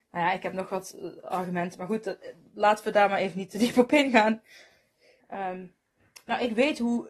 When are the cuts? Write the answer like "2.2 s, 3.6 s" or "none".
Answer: 5.2 s